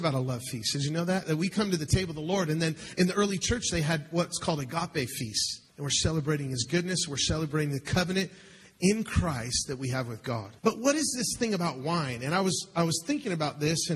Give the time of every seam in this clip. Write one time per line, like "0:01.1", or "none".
0:05.7
0:10.6